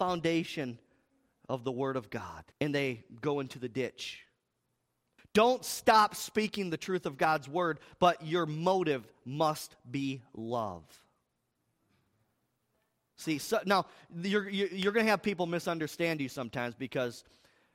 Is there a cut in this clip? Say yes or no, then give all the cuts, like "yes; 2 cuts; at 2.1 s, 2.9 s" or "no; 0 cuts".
yes; 2 cuts; at 2.5 s, 5.2 s